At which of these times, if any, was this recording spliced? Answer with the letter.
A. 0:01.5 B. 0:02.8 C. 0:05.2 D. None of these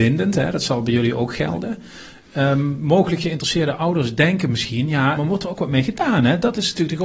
C